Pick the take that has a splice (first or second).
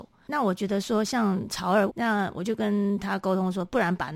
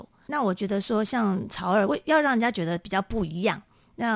first